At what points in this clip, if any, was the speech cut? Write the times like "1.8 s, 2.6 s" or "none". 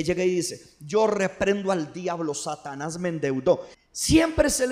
3.7 s